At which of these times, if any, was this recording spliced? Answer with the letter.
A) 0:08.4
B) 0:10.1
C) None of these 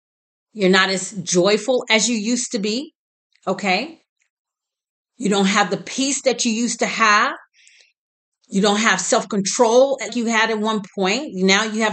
B